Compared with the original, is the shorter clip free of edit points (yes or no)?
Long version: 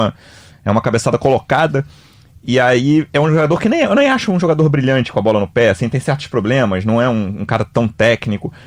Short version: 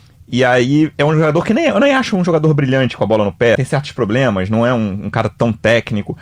no